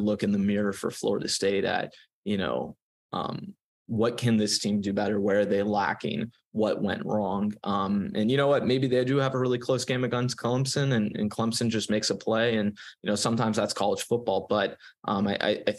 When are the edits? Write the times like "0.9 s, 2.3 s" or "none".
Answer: none